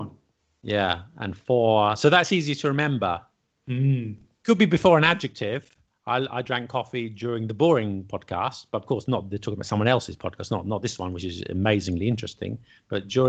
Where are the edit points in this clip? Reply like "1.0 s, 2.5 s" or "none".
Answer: none